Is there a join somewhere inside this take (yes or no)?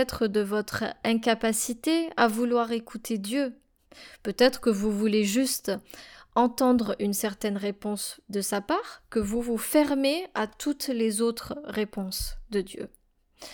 no